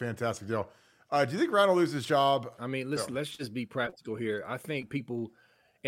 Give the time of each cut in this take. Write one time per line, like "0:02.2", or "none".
0:02.5